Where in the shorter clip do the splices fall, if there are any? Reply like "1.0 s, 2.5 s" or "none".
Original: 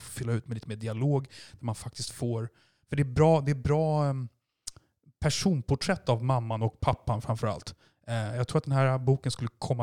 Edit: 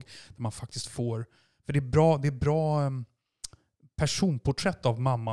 none